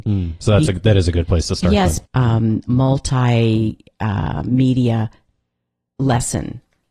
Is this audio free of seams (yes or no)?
no